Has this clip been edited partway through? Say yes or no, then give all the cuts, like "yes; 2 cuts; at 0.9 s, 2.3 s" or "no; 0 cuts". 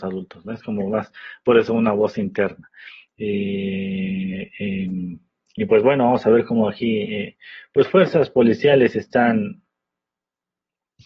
yes; 1 cut; at 3.1 s